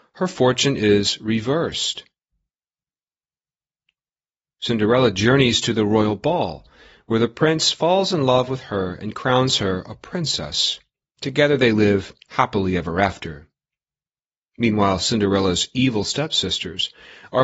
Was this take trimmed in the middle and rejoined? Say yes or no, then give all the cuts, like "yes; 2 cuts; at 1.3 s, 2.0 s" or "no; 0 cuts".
no; 0 cuts